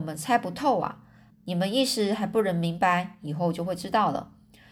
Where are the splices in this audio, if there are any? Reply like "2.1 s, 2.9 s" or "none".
1.3 s